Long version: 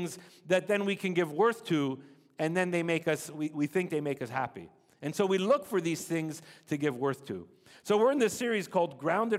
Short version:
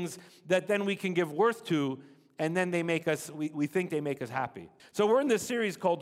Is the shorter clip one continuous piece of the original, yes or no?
no